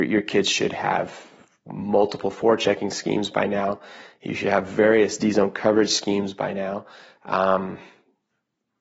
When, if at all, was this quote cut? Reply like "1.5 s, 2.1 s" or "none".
none